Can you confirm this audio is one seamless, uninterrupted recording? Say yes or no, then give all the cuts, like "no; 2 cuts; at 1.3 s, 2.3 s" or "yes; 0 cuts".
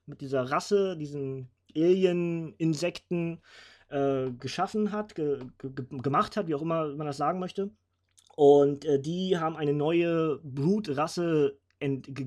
yes; 0 cuts